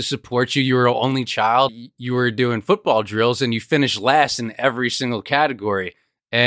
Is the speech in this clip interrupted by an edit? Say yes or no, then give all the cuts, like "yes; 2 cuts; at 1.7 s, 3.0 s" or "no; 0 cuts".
yes; 1 cut; at 1.7 s